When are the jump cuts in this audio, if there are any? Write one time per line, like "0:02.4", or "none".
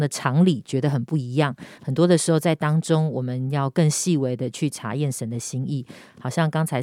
none

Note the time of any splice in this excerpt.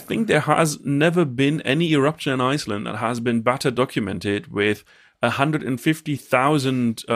none

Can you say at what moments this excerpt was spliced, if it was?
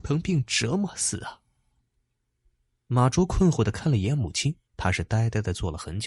0:04.6

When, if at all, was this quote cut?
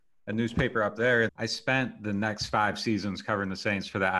0:01.3

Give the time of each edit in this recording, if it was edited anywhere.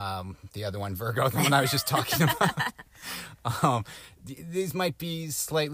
none

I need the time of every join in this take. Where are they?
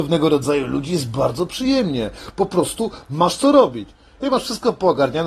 none

